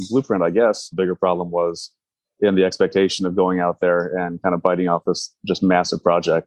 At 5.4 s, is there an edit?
no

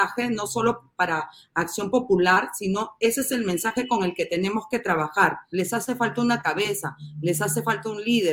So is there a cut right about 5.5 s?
yes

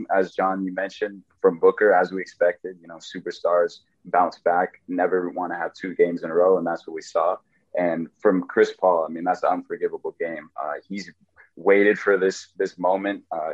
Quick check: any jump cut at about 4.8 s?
no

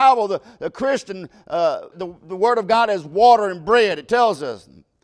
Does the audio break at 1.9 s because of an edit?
yes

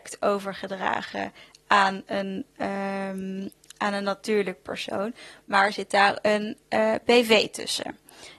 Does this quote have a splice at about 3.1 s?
no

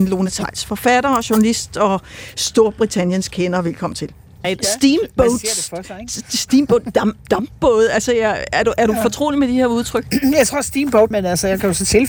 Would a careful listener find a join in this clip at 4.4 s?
yes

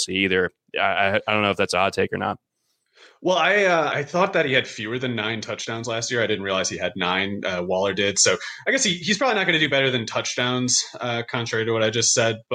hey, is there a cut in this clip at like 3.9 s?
yes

